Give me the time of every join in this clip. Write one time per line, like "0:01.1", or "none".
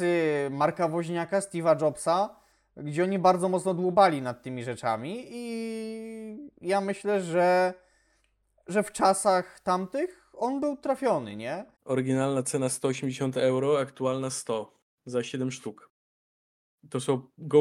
0:11.7